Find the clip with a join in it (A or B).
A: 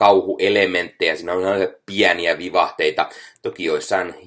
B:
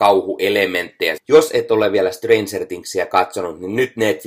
B